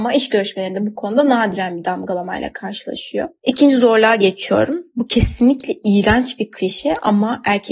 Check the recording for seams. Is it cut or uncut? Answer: cut